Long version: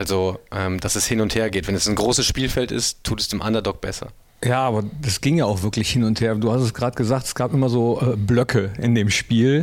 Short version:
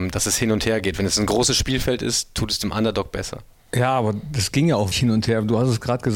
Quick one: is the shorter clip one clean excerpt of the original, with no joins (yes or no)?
no